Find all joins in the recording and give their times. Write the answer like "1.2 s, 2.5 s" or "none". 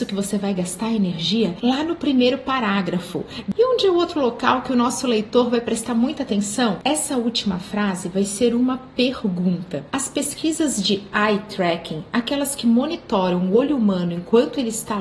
6.8 s